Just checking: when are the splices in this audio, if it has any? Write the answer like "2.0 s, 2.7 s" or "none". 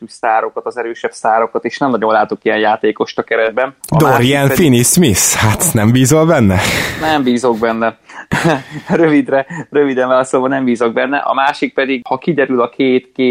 none